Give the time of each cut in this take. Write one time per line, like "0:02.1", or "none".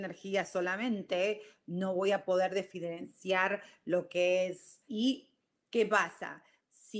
0:04.9